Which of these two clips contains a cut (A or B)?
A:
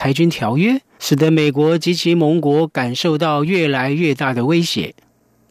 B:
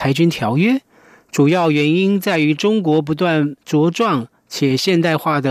A